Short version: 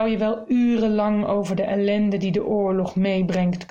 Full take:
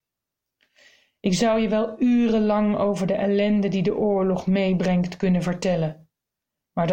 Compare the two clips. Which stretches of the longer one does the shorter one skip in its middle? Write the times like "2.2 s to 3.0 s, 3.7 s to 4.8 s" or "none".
none